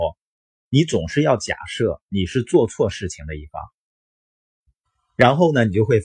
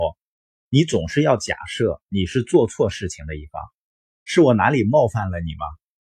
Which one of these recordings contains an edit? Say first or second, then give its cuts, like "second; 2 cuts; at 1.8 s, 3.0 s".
second; 1 cut; at 4.3 s